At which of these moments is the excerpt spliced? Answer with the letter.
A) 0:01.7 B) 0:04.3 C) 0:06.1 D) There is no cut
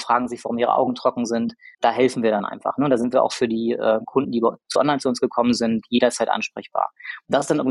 A